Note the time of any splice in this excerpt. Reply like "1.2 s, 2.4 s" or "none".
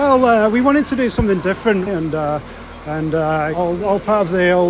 1.9 s, 3.5 s